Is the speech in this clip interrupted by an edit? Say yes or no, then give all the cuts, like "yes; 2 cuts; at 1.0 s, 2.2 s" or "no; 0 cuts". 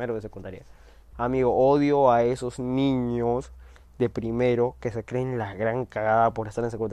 yes; 1 cut; at 1.1 s